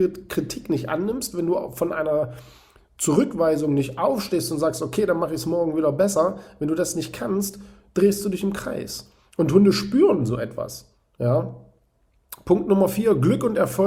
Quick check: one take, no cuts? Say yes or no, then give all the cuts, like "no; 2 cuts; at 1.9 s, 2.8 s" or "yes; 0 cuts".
yes; 0 cuts